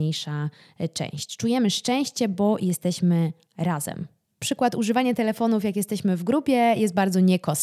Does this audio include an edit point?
no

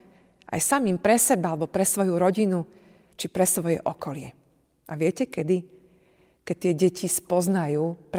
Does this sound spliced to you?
no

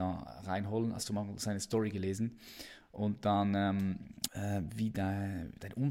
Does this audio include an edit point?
yes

